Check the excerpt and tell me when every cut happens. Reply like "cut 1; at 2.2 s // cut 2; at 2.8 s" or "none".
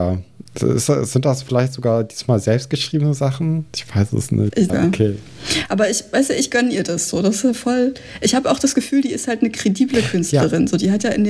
cut 1; at 4.7 s